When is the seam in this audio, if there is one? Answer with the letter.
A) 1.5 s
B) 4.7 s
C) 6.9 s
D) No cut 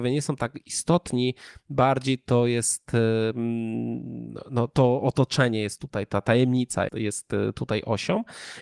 C